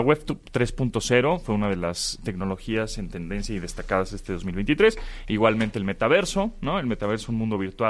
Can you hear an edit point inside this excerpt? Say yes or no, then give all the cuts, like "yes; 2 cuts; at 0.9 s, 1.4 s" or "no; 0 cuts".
no; 0 cuts